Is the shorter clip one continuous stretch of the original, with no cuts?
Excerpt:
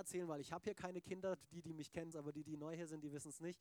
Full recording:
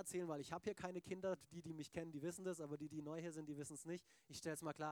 no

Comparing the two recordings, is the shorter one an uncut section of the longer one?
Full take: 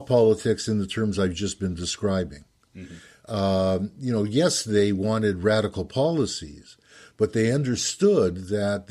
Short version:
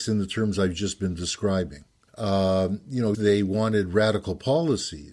no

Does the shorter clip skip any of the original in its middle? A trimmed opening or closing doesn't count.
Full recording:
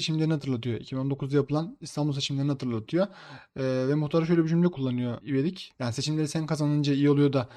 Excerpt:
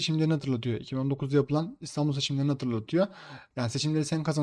yes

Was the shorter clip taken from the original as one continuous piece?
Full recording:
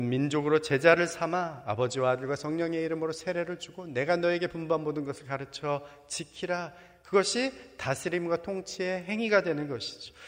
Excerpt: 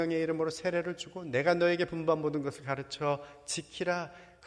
yes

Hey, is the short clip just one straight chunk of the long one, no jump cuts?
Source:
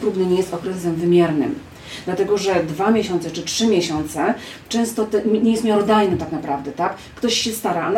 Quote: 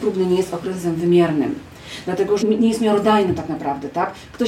no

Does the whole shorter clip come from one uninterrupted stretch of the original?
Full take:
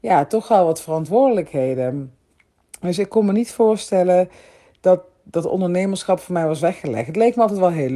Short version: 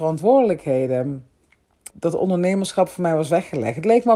no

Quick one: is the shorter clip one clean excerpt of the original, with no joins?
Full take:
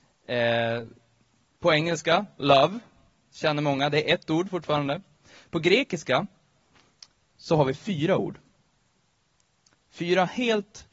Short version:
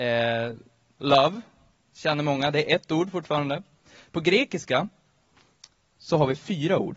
no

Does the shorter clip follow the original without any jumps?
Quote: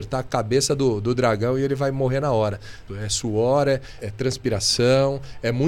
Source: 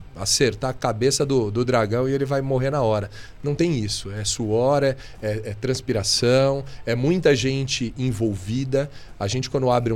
no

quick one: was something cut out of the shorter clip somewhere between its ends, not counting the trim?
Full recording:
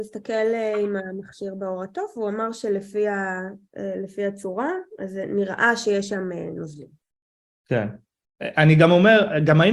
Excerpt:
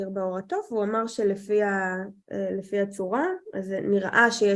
no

